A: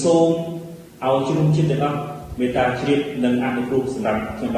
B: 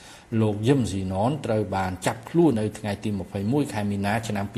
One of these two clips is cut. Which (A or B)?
B